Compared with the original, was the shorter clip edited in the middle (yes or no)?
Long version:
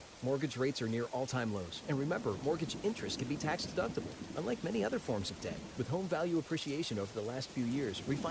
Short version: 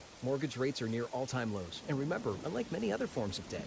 yes